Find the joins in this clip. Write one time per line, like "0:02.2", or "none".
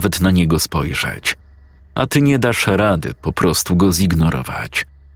0:01.8